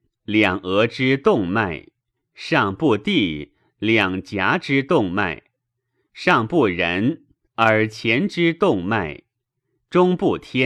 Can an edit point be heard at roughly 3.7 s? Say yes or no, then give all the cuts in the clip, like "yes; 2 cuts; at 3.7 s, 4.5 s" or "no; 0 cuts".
no; 0 cuts